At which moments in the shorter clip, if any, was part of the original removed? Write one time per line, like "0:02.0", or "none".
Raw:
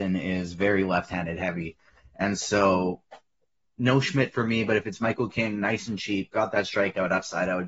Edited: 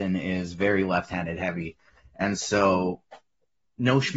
none